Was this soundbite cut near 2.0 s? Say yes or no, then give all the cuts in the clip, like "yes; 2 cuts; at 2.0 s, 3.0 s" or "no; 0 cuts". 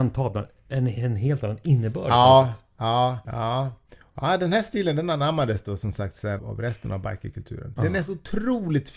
no; 3 cuts; at 3.2 s, 6.4 s, 7.8 s